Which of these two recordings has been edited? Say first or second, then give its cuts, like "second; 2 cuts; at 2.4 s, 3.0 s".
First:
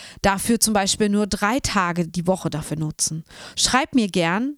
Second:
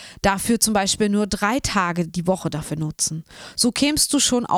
first; 1 cut; at 3.5 s